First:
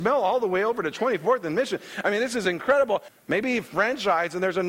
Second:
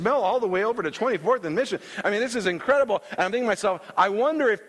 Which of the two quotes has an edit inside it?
first; 1 cut; at 3.1 s

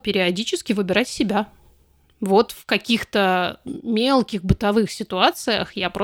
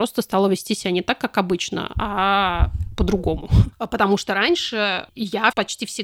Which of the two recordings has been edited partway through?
second; 1 cut; at 3.7 s

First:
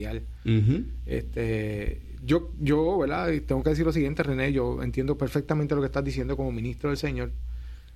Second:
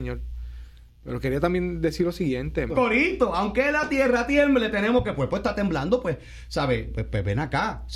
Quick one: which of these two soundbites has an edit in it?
second; 1 cut; at 2.7 s

